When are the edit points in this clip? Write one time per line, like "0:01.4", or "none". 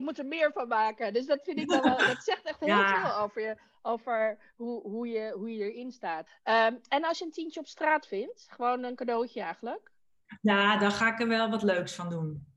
0:06.3